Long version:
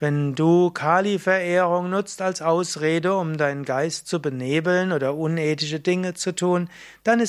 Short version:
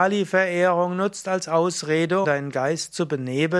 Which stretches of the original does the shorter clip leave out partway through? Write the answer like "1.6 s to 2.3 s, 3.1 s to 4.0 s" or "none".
3.2 s to 3.4 s